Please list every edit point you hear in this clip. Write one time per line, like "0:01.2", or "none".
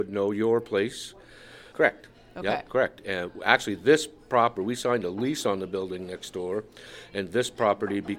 0:01.7